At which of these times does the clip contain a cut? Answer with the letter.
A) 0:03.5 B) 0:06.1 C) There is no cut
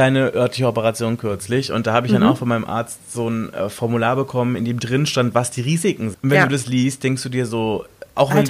B